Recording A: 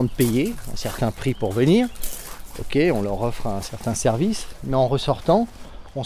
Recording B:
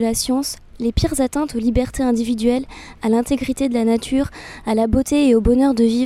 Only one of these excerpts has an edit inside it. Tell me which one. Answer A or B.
B